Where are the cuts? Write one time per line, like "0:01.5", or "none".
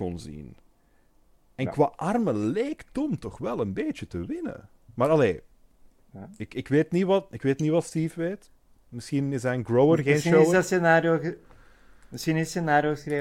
none